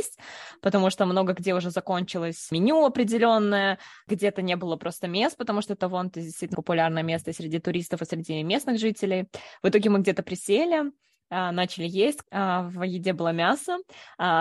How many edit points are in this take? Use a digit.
2